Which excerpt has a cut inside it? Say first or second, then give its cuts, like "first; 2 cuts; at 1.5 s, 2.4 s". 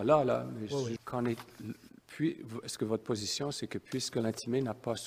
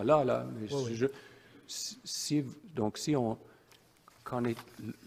first; 1 cut; at 1.0 s